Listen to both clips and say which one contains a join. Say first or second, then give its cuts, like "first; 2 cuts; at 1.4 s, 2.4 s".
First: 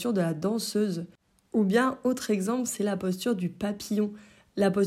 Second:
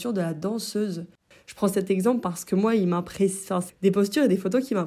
second; 2 cuts; at 1.3 s, 3.7 s